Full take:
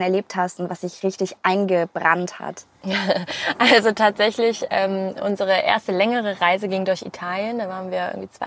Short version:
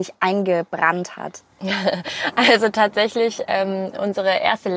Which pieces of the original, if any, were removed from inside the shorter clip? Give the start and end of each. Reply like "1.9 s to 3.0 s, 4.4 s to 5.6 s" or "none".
none